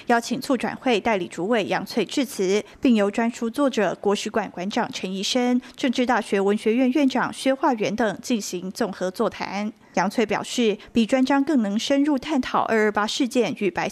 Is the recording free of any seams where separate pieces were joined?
no; 1 cut; at 10.9 s

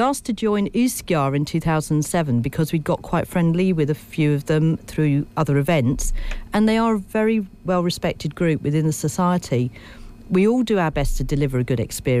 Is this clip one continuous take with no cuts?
yes; 0 cuts

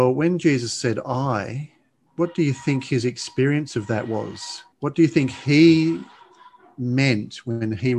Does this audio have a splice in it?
yes; 2 cuts; at 2.1 s, 4.7 s

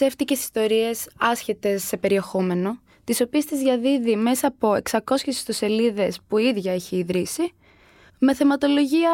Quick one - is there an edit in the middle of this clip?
no; 0 cuts

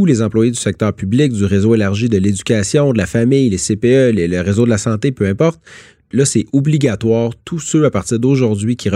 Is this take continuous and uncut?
no; 1 cut; at 6.1 s

